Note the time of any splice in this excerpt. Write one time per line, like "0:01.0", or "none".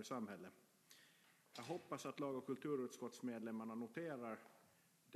0:01.4